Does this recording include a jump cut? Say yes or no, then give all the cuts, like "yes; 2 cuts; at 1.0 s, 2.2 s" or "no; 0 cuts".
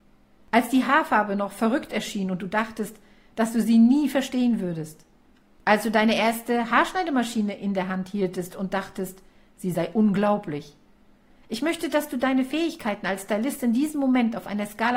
no; 0 cuts